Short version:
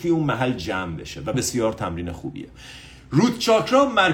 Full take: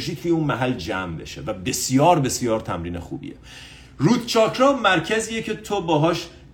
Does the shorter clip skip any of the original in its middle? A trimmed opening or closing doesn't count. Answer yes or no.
yes